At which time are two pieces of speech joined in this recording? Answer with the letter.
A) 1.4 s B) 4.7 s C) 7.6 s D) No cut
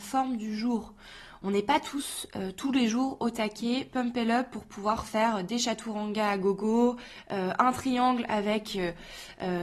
D